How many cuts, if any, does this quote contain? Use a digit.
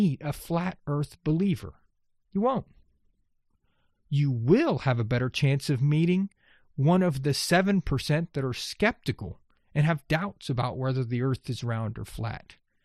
0